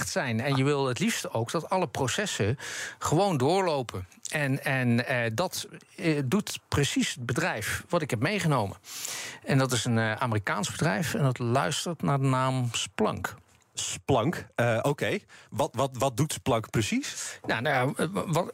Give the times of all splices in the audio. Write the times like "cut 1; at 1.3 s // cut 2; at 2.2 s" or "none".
none